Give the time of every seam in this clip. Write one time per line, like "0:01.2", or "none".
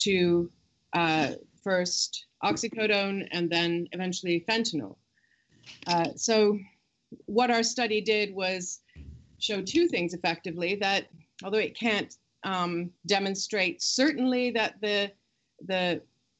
0:01.6
0:13.0

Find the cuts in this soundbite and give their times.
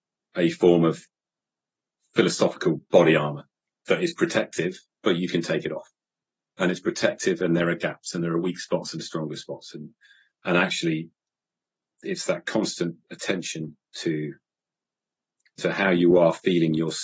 none

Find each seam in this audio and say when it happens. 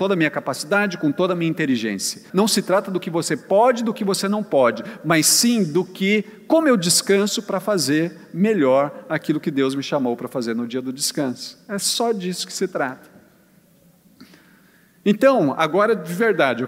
0:02.3

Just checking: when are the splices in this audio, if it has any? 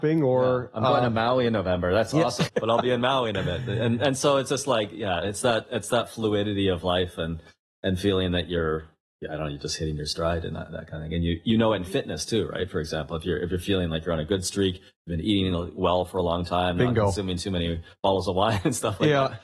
0:02.5

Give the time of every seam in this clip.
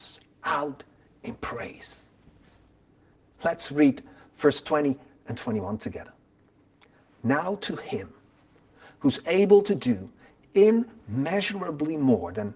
none

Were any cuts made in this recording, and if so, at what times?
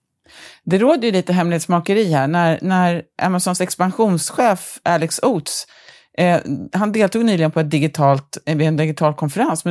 none

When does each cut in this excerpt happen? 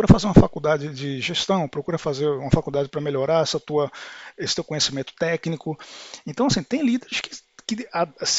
none

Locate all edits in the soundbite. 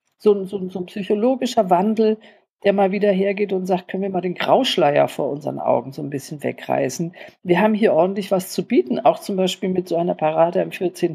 none

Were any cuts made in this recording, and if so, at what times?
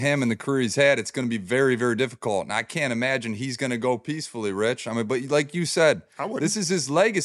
none

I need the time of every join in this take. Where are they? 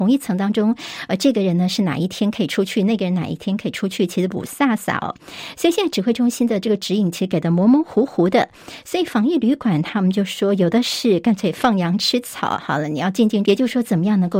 0:13.4

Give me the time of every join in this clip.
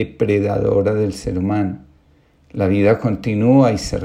none

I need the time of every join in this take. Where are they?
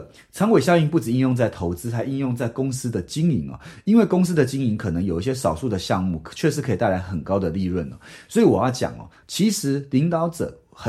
0:09.2

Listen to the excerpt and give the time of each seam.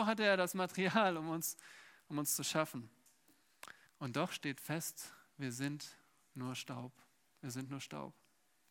0:03.9

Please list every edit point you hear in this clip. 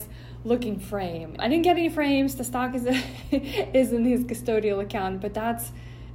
0:01.4

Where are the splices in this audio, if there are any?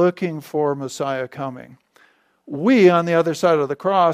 none

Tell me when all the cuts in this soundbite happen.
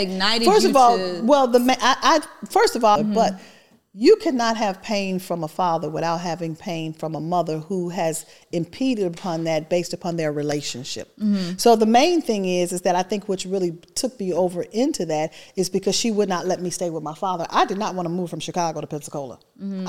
0:03.0

